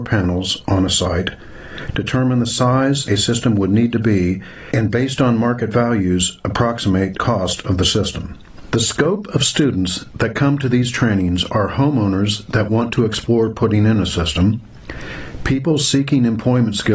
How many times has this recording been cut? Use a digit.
0